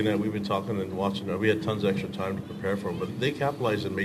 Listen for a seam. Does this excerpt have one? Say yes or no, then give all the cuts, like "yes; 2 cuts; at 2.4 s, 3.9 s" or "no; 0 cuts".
yes; 1 cut; at 3.1 s